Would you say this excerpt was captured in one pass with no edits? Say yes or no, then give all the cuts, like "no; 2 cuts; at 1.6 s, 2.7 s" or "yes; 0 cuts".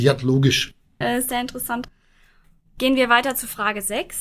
no; 1 cut; at 1.0 s